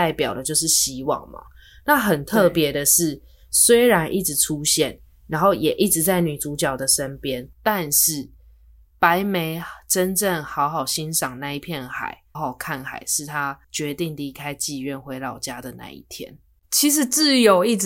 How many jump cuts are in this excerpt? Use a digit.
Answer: 2